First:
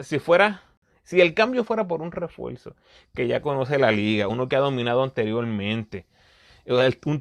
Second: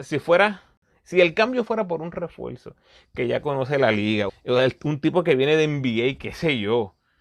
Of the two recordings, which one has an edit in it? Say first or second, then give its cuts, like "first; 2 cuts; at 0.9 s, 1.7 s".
second; 1 cut; at 4.3 s